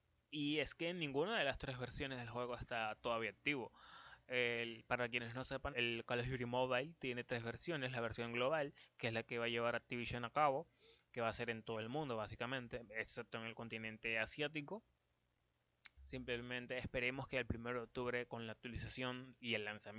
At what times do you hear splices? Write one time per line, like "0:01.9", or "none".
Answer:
0:05.7
0:16.0